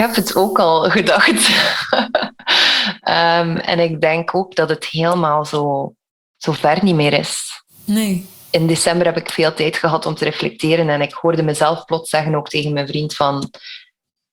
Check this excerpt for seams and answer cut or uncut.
uncut